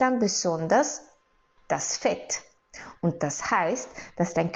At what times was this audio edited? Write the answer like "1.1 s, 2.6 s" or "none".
1.6 s